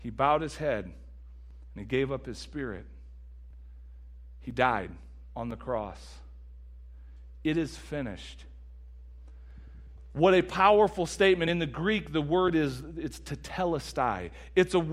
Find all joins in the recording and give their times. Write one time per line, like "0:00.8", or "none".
none